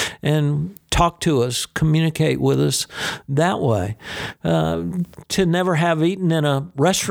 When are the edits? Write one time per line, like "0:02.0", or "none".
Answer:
none